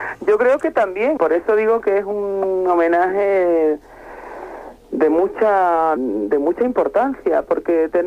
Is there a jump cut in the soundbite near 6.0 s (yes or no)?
yes